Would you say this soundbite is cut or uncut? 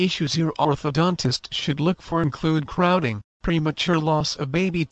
uncut